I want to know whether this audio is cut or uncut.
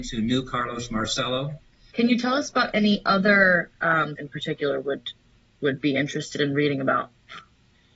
cut